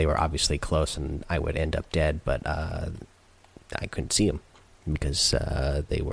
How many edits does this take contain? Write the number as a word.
zero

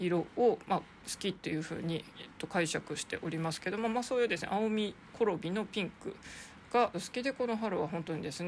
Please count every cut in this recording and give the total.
one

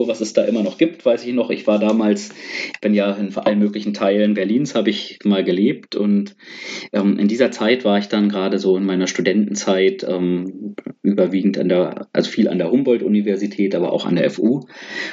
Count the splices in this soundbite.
zero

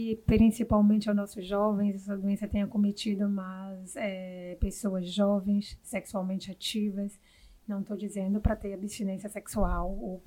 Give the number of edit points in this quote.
one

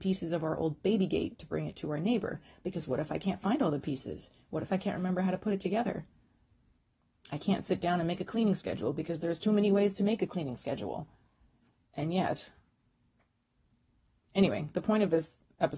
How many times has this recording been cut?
one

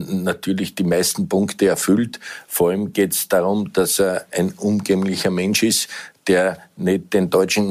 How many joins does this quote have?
zero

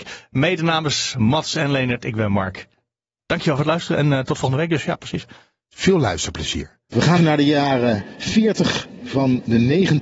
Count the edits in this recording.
one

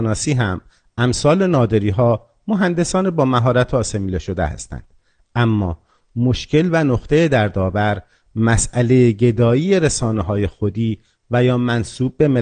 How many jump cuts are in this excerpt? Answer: zero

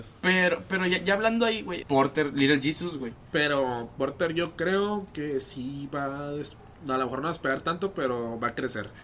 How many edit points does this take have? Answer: one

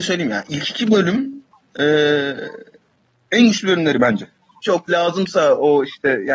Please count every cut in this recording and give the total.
one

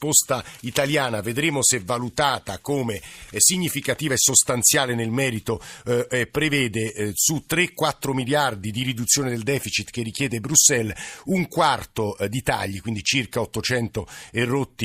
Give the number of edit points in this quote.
one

